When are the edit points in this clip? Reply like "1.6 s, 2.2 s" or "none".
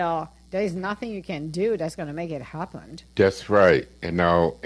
3.1 s